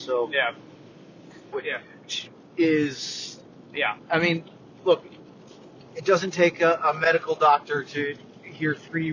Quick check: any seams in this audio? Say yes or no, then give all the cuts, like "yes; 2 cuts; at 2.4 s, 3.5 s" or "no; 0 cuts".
yes; 1 cut; at 1.5 s